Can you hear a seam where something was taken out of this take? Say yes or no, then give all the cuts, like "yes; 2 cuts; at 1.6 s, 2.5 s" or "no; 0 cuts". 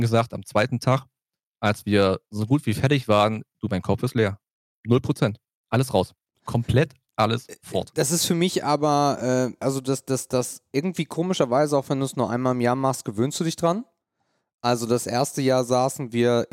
yes; 1 cut; at 6.3 s